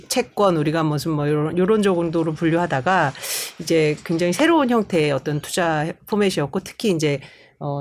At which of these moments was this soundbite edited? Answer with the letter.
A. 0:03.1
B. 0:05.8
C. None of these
C